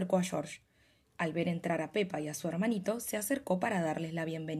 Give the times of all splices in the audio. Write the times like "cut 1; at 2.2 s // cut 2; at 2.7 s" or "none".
cut 1; at 1.0 s